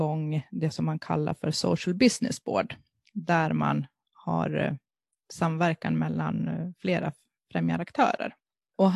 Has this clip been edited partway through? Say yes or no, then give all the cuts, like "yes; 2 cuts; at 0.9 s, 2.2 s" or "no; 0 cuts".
no; 0 cuts